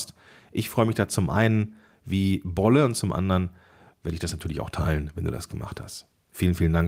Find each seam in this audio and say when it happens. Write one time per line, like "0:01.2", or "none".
none